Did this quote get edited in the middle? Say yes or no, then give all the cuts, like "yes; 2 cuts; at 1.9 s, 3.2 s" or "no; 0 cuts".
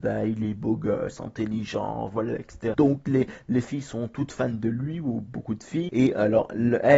yes; 2 cuts; at 2.7 s, 5.9 s